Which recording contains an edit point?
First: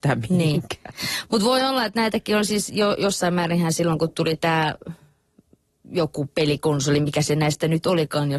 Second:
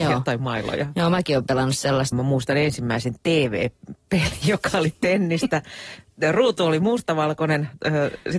second; 1 cut; at 2.1 s

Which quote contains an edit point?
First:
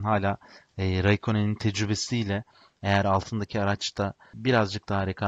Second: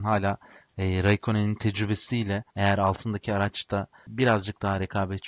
second; 1 cut; at 2.5 s

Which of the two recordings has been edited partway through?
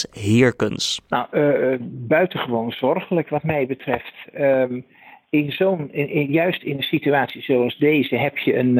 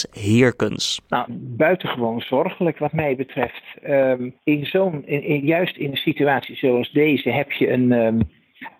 second; 2 cuts; at 1.3 s, 4.4 s

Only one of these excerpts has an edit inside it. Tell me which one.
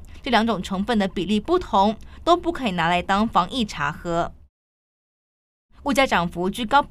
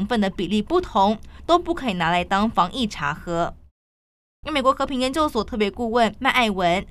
second; 1 cut; at 4.4 s

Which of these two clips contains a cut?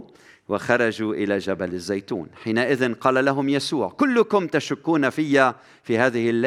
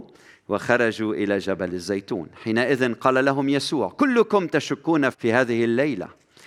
second; 1 cut; at 5.1 s

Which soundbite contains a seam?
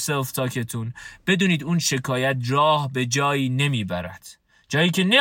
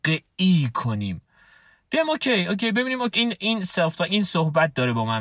second; 1 cut; at 3.1 s

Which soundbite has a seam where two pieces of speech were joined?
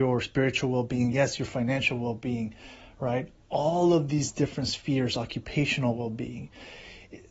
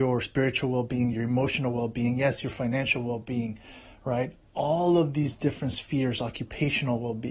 first; 1 cut; at 1.1 s

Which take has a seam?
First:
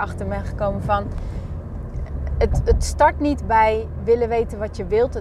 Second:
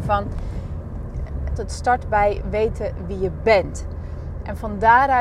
second; 1 cut; at 1.6 s

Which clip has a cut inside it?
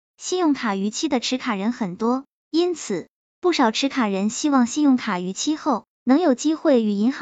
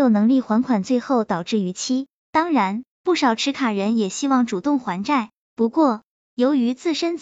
second; 1 cut; at 2.9 s

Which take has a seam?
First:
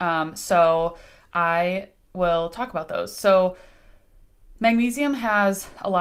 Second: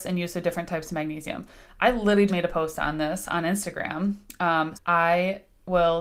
second; 2 cuts; at 2.3 s, 4.7 s

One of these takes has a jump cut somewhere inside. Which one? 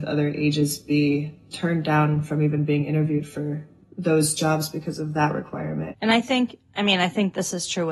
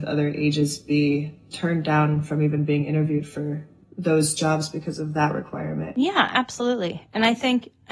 first; 1 cut; at 5.9 s

